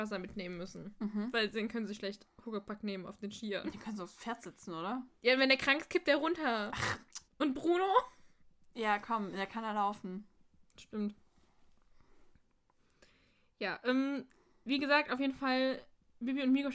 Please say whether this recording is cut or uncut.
cut